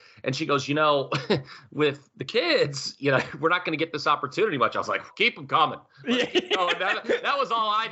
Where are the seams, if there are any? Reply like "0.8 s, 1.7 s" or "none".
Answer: 5.1 s